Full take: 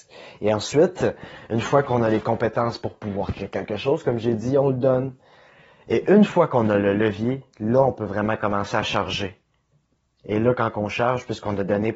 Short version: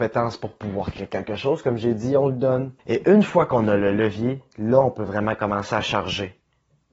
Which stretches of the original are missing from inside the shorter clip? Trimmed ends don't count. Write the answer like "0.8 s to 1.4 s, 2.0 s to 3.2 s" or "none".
5.2 s to 5.8 s